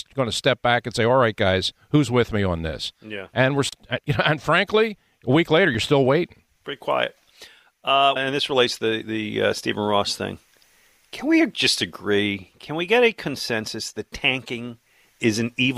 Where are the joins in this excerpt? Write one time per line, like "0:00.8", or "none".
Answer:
0:08.2